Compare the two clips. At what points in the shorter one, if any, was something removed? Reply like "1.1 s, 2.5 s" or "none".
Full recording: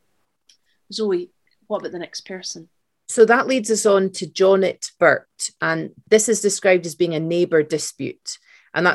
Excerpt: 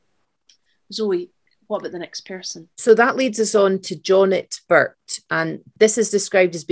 2.7 s